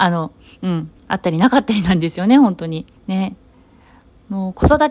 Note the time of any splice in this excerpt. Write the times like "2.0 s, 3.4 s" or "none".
1.0 s, 3.0 s